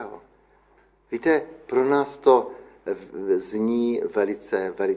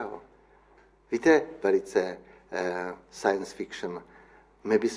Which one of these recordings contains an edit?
second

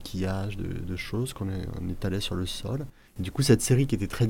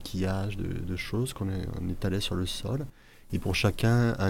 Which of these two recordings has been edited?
first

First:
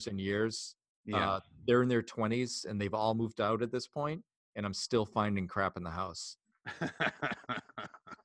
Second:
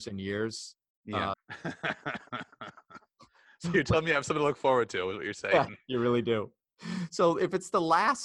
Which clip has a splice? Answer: second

